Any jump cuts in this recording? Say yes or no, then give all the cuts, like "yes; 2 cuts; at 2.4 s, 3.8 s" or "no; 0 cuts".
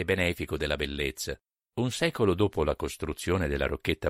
yes; 1 cut; at 1.6 s